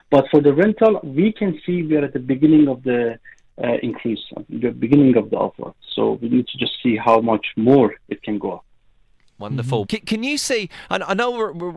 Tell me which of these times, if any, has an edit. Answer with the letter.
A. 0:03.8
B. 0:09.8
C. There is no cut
B